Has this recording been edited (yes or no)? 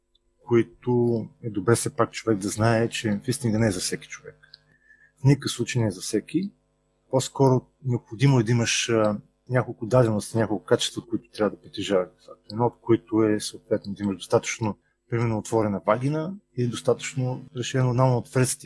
yes